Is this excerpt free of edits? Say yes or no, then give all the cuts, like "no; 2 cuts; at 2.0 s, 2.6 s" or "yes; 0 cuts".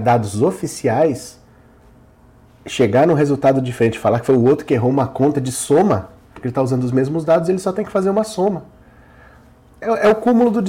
no; 1 cut; at 6.4 s